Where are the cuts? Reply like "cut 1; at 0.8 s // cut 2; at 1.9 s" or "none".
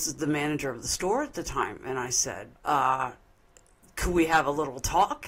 cut 1; at 2.5 s